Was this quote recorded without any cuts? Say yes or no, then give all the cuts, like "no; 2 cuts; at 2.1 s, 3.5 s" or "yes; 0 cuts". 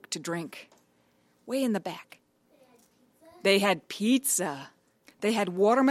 yes; 0 cuts